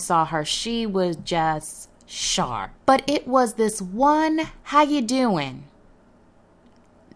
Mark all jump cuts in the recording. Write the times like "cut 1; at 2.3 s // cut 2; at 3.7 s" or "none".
cut 1; at 2.8 s // cut 2; at 4.6 s

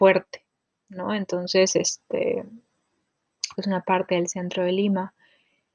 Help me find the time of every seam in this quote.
cut 1; at 3.5 s

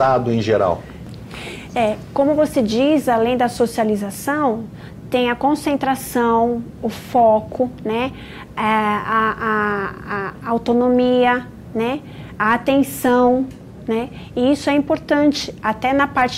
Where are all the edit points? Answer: none

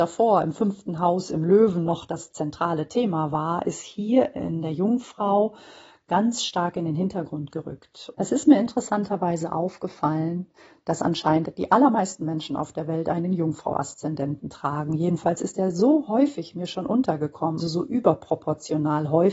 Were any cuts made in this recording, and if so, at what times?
cut 1; at 8.1 s // cut 2; at 17.6 s

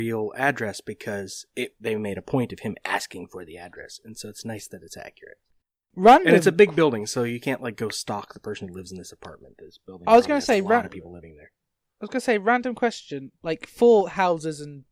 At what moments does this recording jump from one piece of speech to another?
none

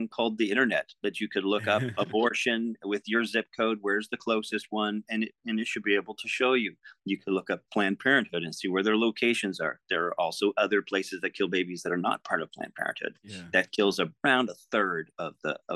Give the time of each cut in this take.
none

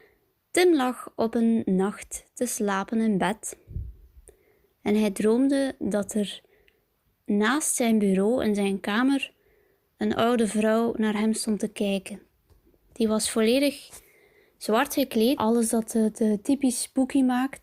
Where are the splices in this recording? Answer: cut 1; at 15.4 s

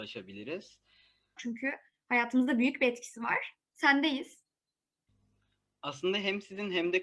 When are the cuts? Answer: cut 1; at 1.4 s

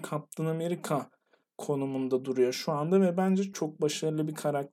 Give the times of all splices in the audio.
cut 1; at 3.5 s

